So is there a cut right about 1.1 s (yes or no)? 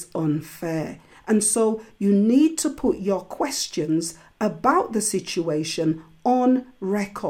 no